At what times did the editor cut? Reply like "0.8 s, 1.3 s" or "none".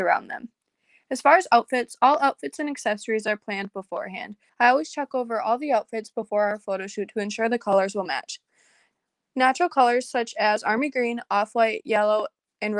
4.5 s